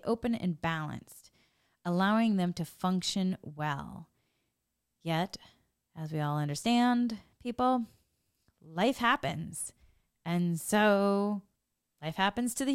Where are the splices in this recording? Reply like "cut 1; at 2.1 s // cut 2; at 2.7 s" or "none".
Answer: none